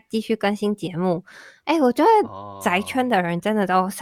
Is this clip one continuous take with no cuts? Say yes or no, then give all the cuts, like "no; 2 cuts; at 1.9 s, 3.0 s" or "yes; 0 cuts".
yes; 0 cuts